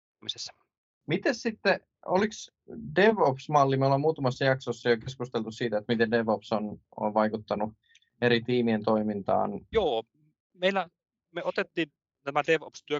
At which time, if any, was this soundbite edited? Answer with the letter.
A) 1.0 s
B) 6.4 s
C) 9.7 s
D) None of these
C